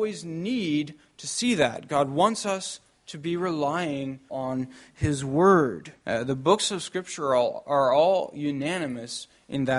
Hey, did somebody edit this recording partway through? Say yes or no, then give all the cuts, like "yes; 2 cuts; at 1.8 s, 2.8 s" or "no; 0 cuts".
yes; 2 cuts; at 4.3 s, 6.0 s